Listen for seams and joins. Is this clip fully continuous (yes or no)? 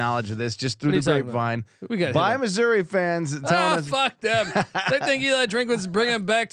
yes